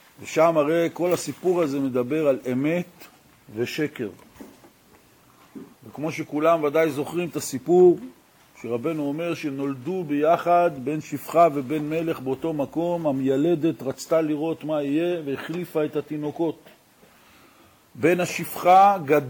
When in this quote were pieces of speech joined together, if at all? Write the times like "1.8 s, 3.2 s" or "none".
5.7 s